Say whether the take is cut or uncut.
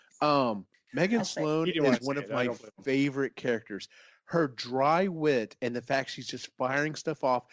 uncut